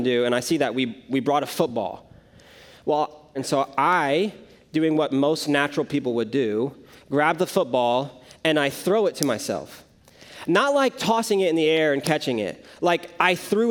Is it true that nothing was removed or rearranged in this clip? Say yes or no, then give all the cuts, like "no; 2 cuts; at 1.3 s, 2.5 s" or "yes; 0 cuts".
no; 1 cut; at 3.4 s